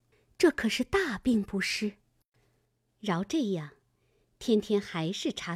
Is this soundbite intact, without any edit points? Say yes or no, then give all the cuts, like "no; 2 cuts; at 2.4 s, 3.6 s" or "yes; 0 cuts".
no; 1 cut; at 2.9 s